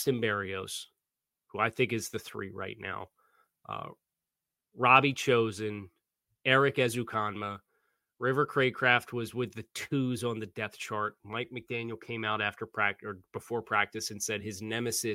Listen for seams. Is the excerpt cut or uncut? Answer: uncut